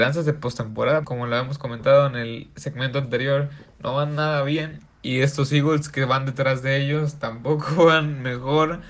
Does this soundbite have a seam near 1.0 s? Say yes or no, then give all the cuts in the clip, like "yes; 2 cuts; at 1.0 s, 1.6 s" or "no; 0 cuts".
yes; 1 cut; at 1.0 s